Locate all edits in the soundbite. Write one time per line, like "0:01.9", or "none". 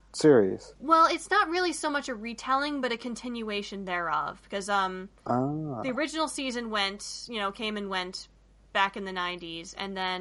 none